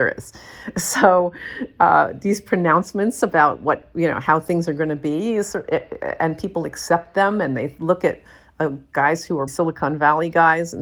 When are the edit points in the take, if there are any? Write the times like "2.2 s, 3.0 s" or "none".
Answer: 9.5 s